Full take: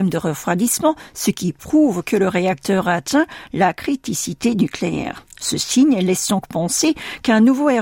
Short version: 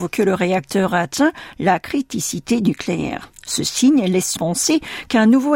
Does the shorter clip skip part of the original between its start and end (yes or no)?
yes